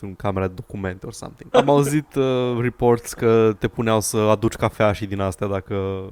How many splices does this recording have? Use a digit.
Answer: 1